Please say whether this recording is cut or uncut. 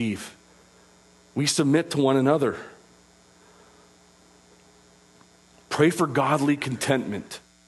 uncut